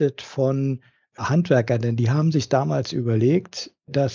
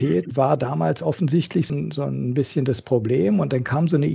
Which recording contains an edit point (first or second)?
second